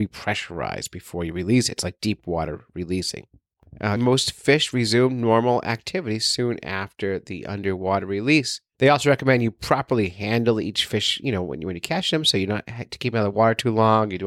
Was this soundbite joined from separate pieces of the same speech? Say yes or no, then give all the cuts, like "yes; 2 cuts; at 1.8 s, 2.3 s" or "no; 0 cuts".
yes; 1 cut; at 4.0 s